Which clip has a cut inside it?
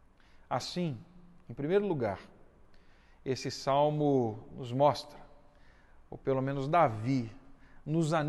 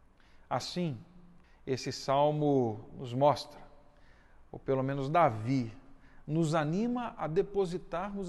second; 1 cut; at 1.4 s

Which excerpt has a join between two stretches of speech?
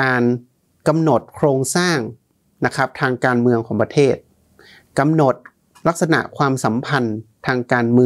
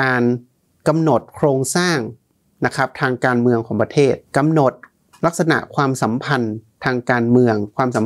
second; 1 cut; at 4.3 s

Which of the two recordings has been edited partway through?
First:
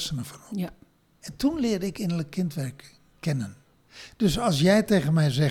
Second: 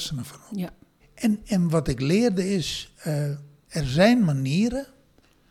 second; 2 cuts; at 1.0 s, 3.7 s

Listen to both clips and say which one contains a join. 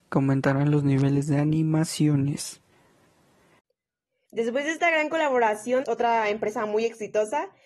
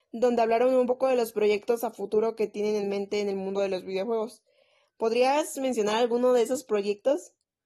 first; 2 cuts; at 4.2 s, 5.8 s

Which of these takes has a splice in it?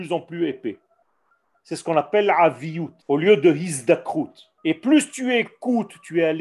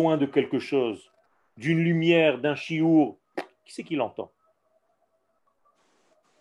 first; 2 cuts; at 3.0 s, 4.6 s

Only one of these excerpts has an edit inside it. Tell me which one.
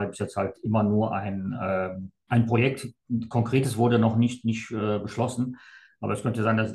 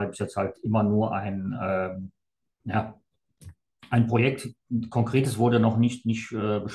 first; 1 cut; at 2.3 s

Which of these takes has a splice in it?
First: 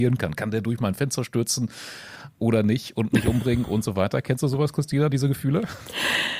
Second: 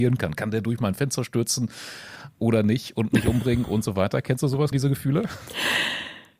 second; 1 cut; at 4.7 s

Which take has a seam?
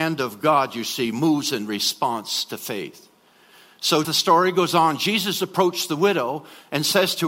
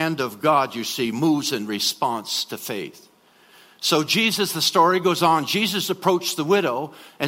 first; 1 cut; at 4.0 s

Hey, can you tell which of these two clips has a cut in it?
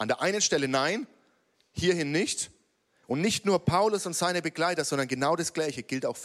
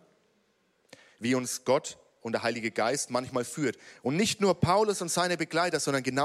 first; 1 cut; at 3.0 s

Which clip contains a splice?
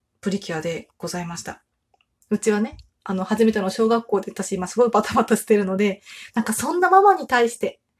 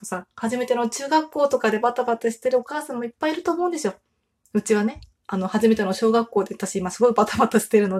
first; 1 cut; at 2.1 s

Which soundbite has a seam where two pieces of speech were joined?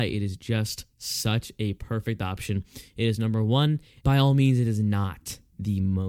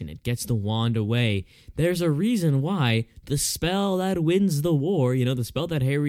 first; 1 cut; at 4.0 s

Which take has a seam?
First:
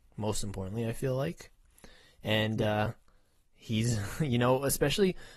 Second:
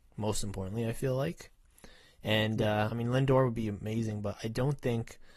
second; 1 cut; at 2.9 s

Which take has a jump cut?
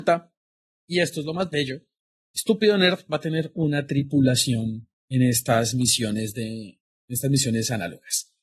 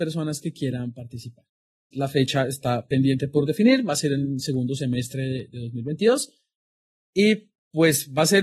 second; 1 cut; at 1.9 s

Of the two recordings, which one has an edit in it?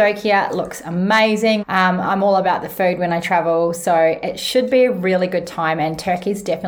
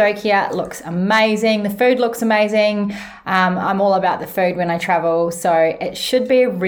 first; 1 cut; at 1.6 s

